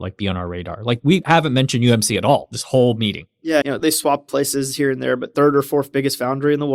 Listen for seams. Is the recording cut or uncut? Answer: cut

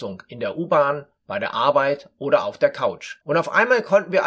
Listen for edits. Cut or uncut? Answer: cut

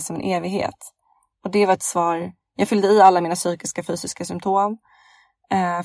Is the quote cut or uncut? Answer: uncut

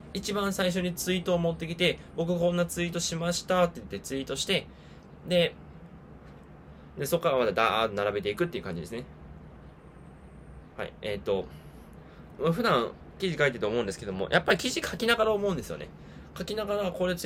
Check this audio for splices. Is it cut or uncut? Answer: cut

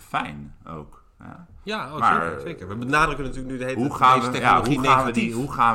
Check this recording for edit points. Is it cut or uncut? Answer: uncut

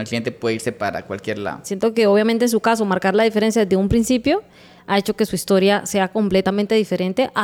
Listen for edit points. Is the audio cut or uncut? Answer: cut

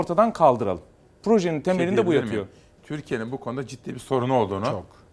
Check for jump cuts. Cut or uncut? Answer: uncut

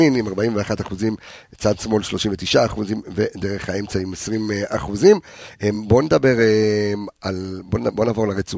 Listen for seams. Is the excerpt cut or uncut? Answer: uncut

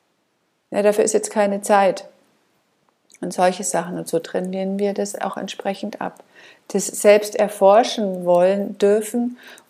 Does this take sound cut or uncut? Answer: uncut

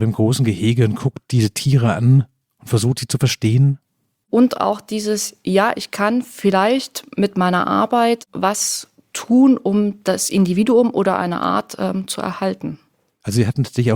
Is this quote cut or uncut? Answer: cut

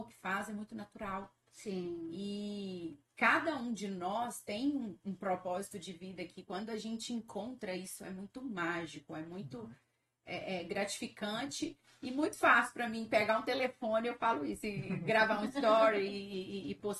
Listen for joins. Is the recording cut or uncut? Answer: uncut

